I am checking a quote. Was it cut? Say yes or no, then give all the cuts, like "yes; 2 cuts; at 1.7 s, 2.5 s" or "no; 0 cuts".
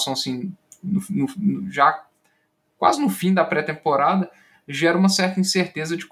no; 0 cuts